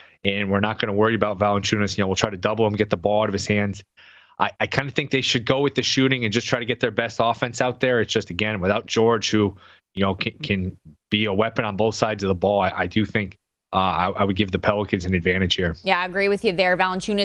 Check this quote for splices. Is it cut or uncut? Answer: uncut